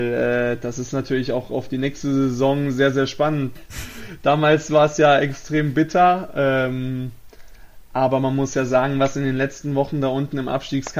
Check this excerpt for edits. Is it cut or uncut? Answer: cut